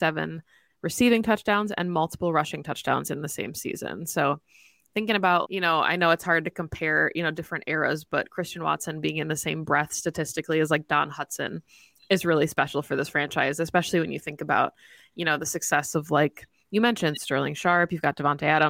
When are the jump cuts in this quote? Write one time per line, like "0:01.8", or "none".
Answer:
0:05.4